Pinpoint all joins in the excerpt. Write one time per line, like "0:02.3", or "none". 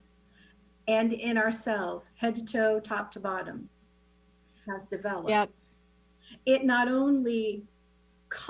0:04.7